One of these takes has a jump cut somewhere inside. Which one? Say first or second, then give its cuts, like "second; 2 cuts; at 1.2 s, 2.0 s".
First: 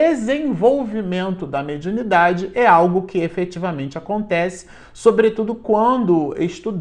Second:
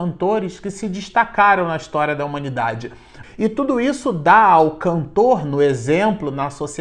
second; 1 cut; at 3.2 s